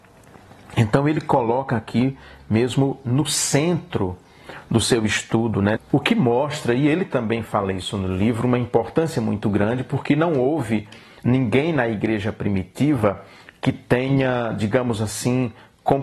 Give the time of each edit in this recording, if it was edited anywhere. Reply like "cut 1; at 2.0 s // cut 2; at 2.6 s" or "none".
cut 1; at 5.8 s